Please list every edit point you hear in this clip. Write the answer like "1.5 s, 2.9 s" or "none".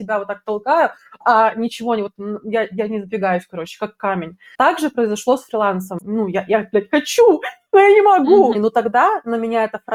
6.0 s, 8.5 s